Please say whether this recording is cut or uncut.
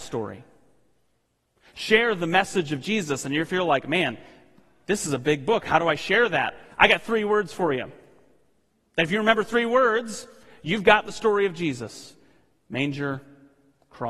uncut